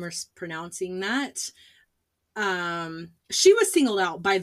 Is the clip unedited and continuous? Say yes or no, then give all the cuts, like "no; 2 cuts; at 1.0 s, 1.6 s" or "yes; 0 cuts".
yes; 0 cuts